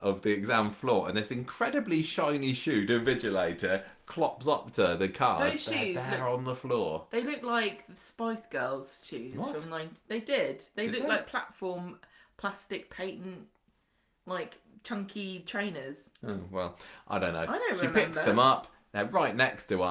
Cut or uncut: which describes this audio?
uncut